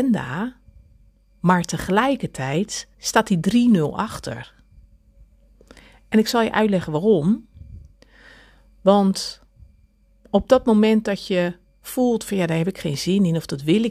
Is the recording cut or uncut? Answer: cut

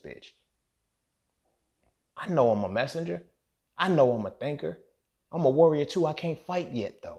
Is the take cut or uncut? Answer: uncut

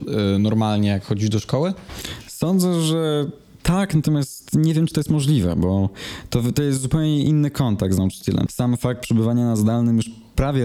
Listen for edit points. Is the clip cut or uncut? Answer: cut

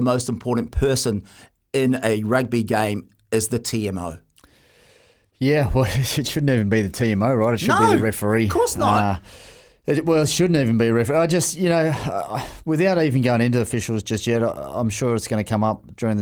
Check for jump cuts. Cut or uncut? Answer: uncut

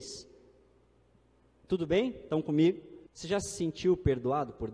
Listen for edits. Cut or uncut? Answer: cut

